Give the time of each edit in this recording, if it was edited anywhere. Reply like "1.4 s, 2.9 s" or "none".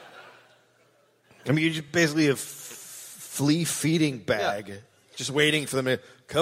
none